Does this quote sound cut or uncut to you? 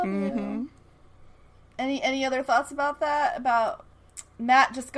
cut